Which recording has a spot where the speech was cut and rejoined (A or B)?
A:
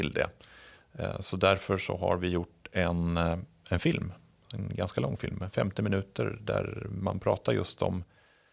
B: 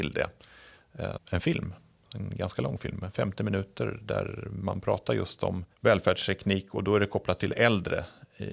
B